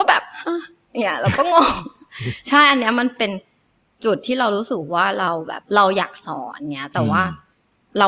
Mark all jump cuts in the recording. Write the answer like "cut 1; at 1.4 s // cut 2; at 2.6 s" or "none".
none

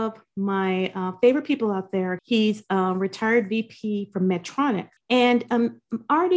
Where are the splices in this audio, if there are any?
cut 1; at 2.2 s // cut 2; at 5.0 s

